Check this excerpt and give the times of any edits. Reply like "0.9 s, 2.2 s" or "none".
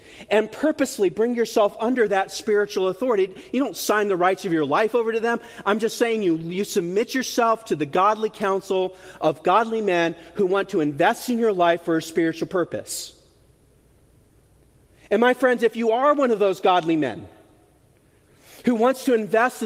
none